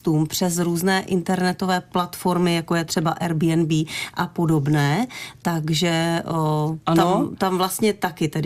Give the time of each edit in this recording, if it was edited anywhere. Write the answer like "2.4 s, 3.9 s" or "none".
6.8 s